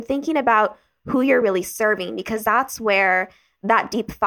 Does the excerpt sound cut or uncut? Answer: uncut